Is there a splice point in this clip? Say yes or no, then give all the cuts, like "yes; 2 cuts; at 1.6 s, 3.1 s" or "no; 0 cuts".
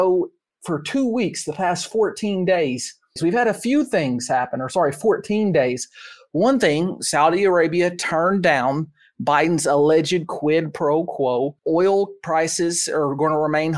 yes; 2 cuts; at 3.2 s, 11.6 s